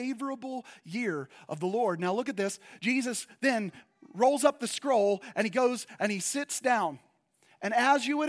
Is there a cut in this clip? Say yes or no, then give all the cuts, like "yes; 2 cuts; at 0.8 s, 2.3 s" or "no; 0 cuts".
no; 0 cuts